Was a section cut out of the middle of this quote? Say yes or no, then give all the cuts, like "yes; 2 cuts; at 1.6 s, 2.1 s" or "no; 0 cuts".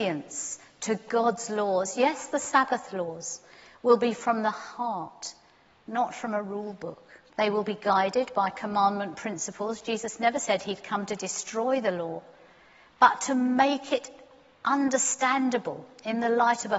yes; 1 cut; at 7.3 s